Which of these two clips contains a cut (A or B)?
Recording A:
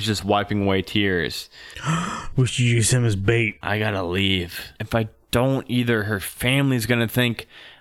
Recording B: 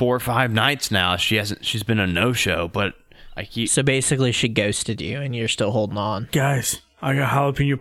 A